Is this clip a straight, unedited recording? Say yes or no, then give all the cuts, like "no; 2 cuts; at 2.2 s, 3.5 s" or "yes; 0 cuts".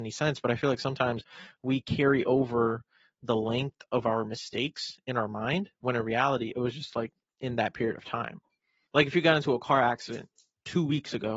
yes; 0 cuts